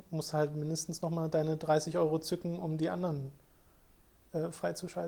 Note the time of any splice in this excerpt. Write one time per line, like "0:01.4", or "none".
none